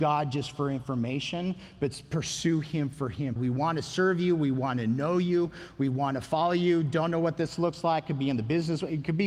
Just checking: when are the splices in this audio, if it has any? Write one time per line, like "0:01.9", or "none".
0:03.4